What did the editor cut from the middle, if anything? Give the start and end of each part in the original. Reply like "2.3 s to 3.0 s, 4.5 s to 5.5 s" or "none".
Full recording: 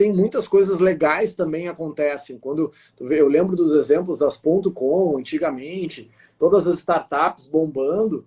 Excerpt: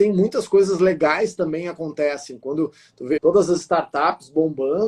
3.2 s to 6.3 s